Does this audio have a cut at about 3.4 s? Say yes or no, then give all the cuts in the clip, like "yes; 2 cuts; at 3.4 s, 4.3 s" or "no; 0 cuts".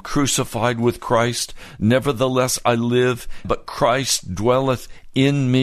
yes; 1 cut; at 3.4 s